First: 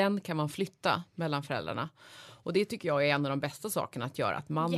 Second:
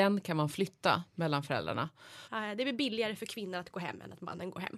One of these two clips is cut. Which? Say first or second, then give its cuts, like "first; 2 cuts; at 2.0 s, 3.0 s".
second; 1 cut; at 2.2 s